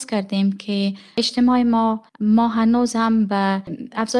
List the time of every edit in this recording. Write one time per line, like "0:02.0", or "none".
0:02.1